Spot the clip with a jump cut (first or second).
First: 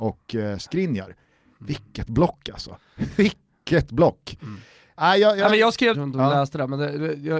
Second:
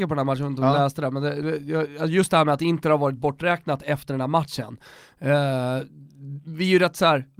first